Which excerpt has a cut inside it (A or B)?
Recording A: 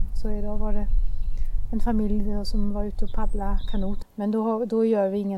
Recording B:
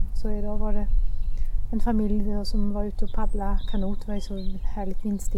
A